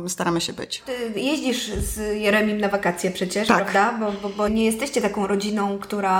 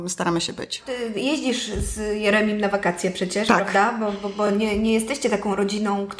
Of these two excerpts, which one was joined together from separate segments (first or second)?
first